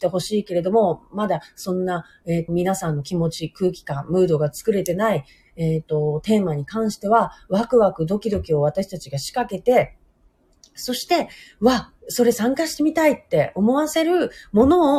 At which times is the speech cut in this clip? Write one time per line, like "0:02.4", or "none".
0:02.5
0:12.0